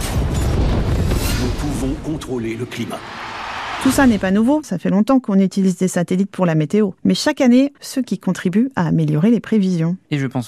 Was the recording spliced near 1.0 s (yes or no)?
no